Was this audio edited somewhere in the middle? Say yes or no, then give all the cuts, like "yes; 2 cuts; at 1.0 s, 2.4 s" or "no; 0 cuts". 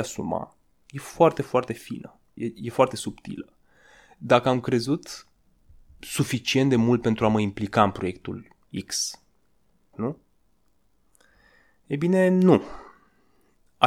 yes; 2 cuts; at 2.4 s, 9.9 s